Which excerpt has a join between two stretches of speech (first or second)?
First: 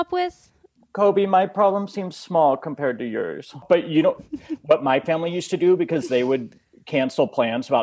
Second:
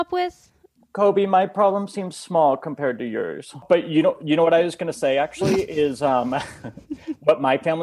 first